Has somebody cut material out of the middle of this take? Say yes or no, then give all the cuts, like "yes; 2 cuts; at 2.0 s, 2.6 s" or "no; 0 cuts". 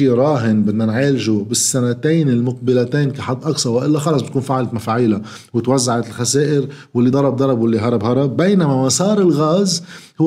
no; 0 cuts